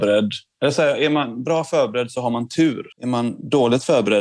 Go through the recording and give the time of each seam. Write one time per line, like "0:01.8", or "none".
0:02.9